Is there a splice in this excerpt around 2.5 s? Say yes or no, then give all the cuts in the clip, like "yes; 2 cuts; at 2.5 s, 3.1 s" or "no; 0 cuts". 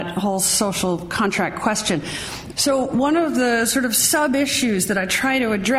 yes; 1 cut; at 2.5 s